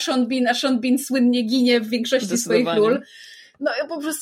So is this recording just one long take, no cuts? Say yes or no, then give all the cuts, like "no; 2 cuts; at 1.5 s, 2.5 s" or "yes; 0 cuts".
yes; 0 cuts